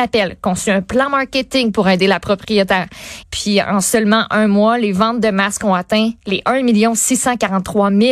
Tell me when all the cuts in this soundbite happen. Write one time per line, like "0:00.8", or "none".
0:03.2
0:06.2